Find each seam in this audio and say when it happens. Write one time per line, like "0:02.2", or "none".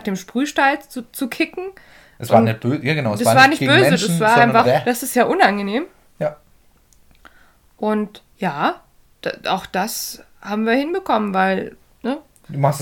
0:04.6

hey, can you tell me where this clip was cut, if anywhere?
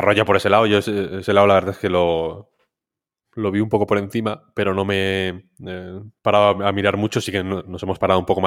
none

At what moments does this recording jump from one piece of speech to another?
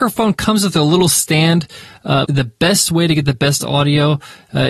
0:02.2

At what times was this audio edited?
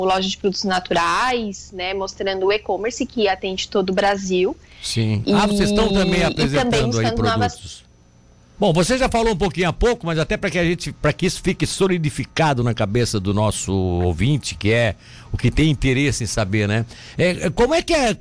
0:08.6

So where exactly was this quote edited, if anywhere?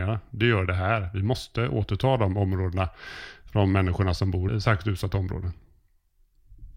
0:04.5

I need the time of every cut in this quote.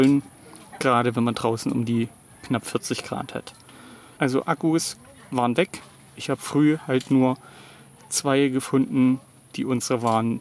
0:04.2

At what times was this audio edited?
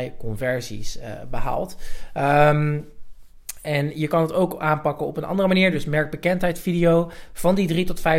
none

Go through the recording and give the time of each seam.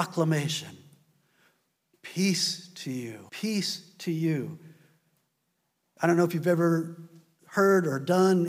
0:03.3

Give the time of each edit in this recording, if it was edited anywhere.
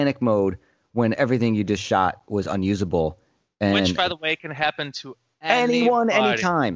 none

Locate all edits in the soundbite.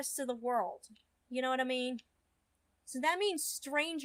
none

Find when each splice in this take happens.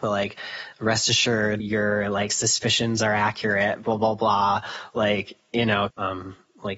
0:01.6
0:05.9

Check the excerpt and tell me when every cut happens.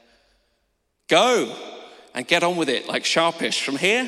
0:01.0

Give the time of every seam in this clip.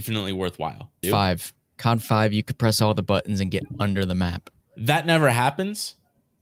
0:01.0
0:04.6

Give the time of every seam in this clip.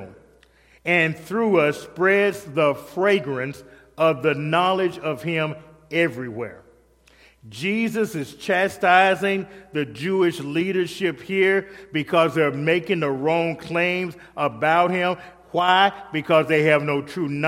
none

